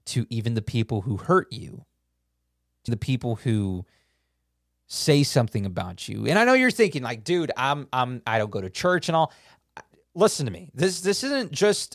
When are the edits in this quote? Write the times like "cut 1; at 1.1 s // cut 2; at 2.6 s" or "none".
cut 1; at 2.9 s